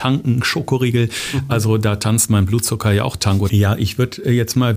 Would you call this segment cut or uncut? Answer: cut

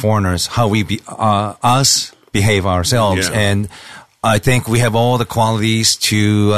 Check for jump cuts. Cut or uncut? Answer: uncut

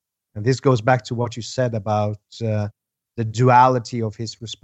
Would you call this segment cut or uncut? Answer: uncut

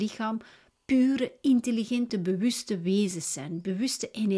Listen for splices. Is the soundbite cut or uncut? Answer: uncut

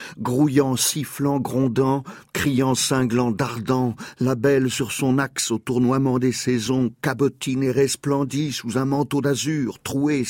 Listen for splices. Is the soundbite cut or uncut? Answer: uncut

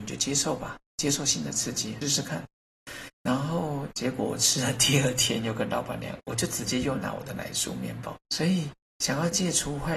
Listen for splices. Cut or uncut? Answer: cut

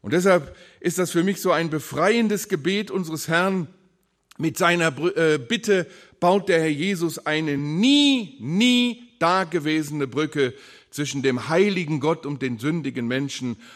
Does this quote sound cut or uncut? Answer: uncut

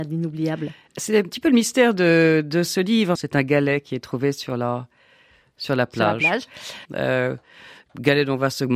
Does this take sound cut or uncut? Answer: cut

